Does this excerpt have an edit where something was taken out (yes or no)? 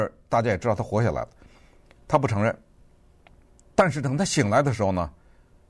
no